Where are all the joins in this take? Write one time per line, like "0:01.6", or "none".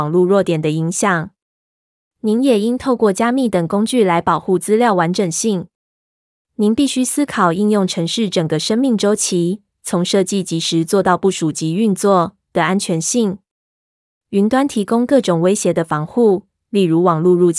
none